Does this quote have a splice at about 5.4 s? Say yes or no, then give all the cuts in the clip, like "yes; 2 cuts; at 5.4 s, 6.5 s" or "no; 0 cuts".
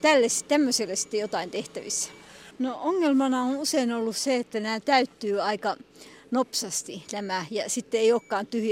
no; 1 cut; at 2.5 s